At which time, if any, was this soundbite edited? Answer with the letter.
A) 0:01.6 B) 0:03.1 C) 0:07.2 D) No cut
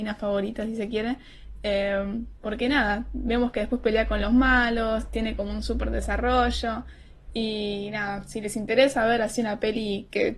D